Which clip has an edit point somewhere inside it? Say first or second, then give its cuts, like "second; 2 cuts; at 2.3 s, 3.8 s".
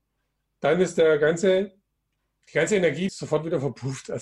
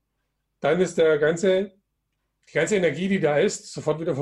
first; 1 cut; at 3.1 s